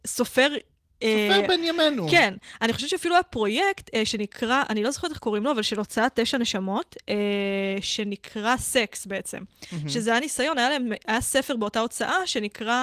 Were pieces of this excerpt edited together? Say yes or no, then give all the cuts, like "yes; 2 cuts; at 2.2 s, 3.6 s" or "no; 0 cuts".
no; 0 cuts